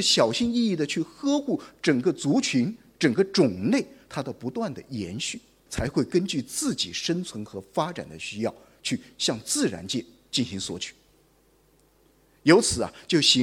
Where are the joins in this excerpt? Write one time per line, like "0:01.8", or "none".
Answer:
0:05.7